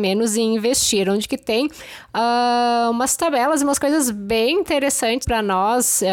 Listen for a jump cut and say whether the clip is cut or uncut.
cut